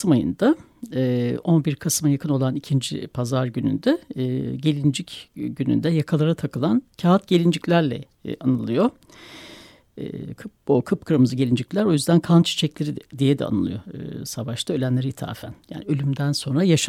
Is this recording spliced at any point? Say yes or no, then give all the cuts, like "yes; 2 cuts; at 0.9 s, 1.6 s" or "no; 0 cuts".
no; 0 cuts